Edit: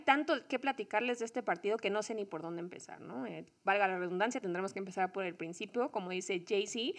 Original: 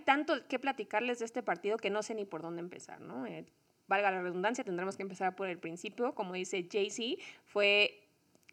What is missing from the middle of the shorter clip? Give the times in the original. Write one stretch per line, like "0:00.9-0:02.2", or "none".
0:03.5-0:03.8